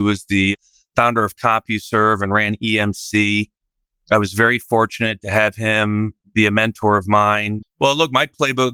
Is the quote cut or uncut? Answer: cut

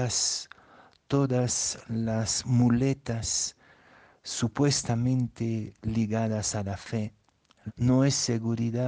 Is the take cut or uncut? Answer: cut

